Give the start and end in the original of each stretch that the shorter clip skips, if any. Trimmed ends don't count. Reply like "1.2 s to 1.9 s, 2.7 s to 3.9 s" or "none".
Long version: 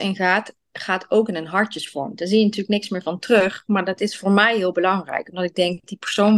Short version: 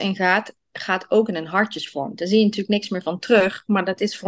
none

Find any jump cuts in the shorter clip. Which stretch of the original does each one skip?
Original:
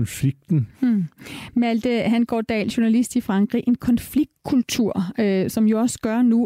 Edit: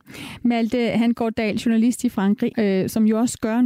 3.6 s to 5.1 s

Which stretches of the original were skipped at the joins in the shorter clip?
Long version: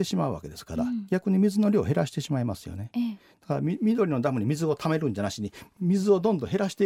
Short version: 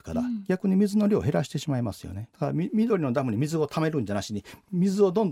2.9 s to 3.4 s

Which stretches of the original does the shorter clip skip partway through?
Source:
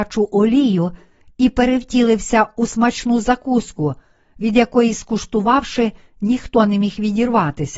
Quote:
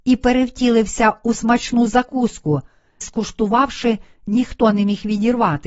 4.3 s to 4.9 s

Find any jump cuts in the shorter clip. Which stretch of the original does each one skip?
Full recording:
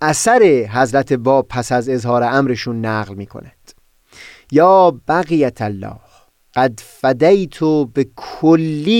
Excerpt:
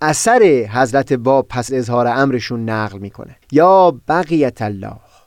1.7 s to 1.8 s, 3.6 s to 4.4 s

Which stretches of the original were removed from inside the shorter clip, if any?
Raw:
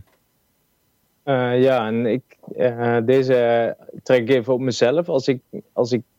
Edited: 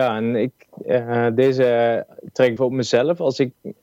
4.3 s to 4.4 s

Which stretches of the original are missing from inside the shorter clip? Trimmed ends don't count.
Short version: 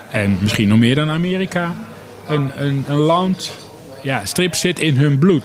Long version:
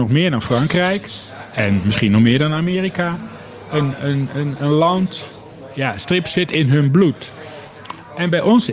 4.3 s to 4.6 s

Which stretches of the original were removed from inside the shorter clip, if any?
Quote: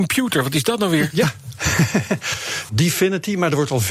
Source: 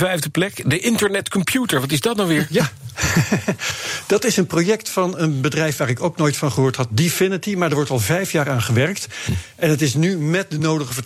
4.1 s to 6.9 s

